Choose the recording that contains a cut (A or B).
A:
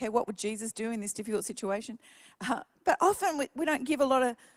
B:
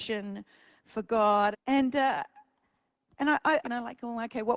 B